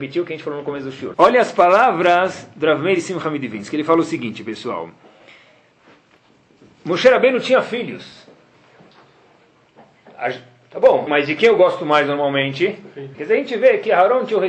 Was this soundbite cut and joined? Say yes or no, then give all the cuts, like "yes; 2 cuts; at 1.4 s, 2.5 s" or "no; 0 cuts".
yes; 3 cuts; at 1.1 s, 11.1 s, 13.1 s